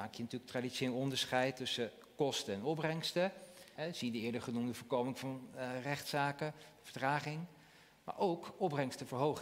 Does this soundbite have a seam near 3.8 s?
yes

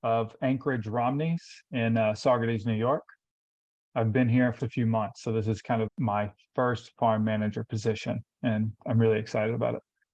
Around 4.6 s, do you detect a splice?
yes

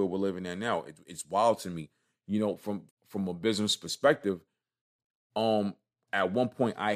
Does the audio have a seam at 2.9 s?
yes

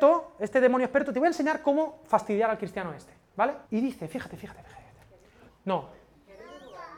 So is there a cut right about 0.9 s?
no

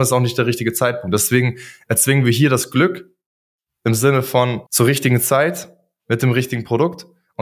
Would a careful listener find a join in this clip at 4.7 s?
yes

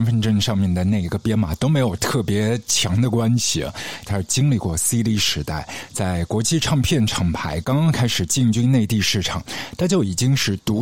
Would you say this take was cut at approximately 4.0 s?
yes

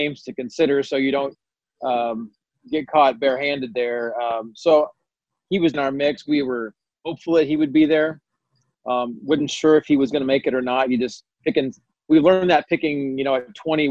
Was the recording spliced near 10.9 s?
no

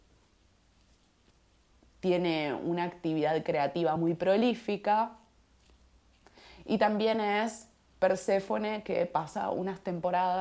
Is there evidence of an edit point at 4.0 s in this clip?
no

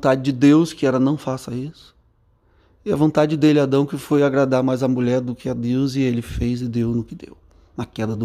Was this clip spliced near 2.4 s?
no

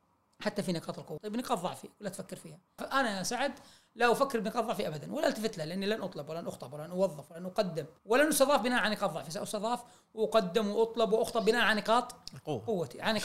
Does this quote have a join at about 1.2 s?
yes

